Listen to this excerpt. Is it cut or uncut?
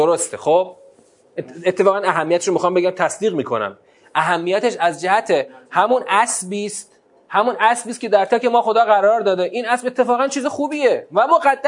cut